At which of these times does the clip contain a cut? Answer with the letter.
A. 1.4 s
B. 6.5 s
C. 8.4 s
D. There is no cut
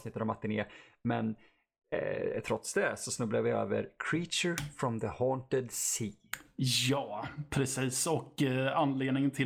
D